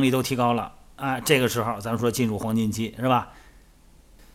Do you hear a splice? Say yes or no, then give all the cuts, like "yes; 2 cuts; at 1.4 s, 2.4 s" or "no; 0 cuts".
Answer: no; 0 cuts